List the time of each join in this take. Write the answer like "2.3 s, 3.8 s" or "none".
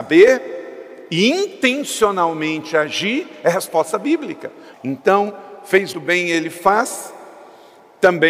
4.7 s, 5.9 s